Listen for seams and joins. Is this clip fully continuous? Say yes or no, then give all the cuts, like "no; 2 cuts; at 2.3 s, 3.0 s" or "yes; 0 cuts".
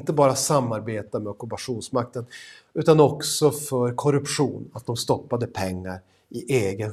yes; 0 cuts